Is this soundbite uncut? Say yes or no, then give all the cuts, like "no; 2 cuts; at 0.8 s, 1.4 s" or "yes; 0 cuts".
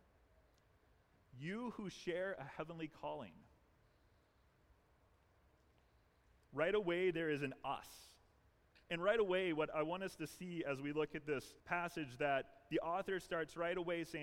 no; 2 cuts; at 8.8 s, 11.6 s